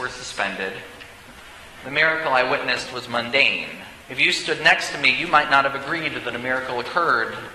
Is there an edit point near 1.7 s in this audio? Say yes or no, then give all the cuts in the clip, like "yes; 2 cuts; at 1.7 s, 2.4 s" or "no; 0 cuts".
no; 1 cut; at 4.0 s